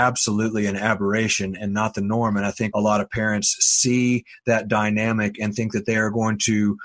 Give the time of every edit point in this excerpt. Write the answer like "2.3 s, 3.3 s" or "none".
2.7 s